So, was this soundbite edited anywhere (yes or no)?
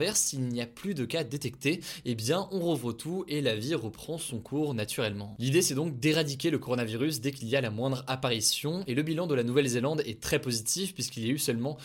no